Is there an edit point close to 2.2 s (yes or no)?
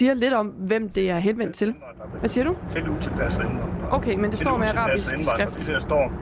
yes